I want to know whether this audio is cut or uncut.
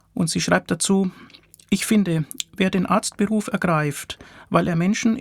uncut